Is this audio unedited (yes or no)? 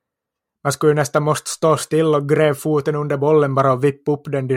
yes